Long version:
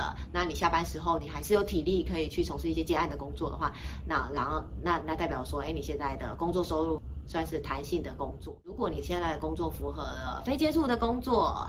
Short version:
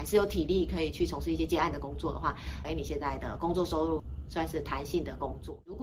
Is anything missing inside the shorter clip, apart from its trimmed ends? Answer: yes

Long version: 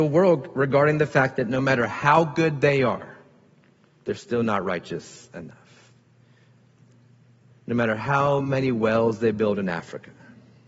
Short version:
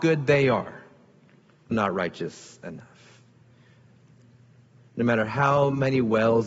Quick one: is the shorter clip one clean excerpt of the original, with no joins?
no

